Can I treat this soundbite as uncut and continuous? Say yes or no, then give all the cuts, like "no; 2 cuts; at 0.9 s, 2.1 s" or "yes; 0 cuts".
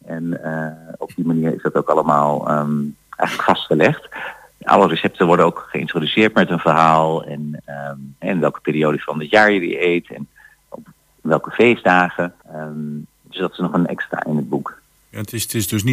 no; 1 cut; at 12.4 s